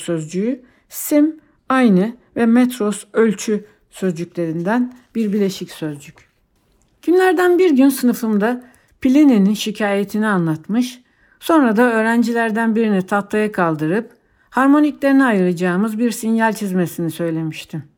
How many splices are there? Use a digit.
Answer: 0